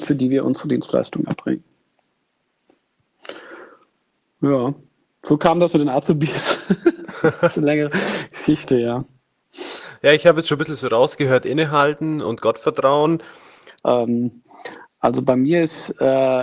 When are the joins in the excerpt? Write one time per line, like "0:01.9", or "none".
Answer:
0:13.8